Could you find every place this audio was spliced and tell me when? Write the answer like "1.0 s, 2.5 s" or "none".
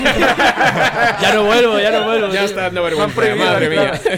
none